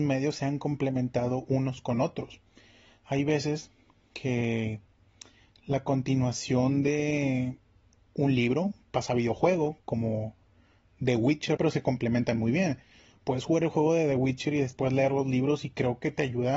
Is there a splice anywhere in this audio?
yes; 1 cut; at 11.6 s

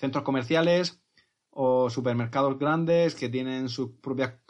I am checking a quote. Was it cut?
no; 0 cuts

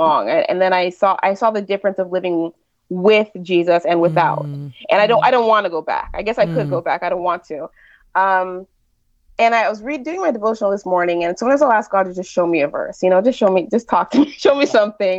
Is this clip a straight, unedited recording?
yes; 0 cuts

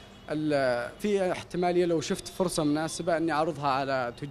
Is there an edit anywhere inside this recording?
yes; 1 cut; at 1.0 s

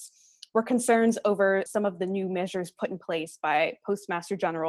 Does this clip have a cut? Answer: yes; 1 cut; at 1.7 s

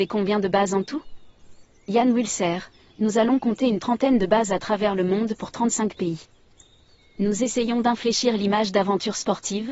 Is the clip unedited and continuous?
yes; 0 cuts

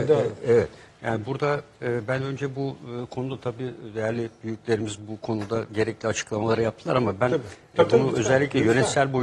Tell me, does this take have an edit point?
no; 0 cuts

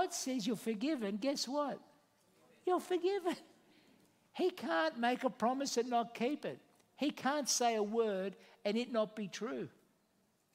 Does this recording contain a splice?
no; 0 cuts

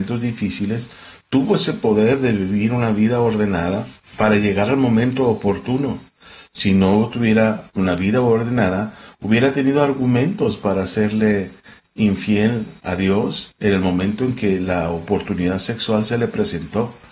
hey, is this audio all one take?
yes; 0 cuts

